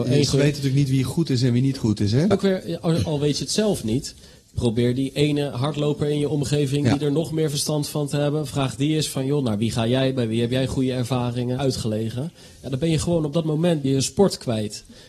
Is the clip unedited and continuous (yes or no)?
no